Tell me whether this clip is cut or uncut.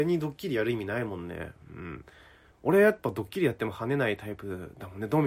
uncut